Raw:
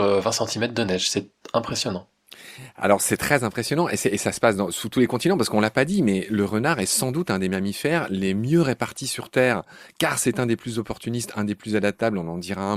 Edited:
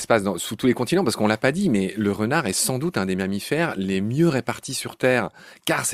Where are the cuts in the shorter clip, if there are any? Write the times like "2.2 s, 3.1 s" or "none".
none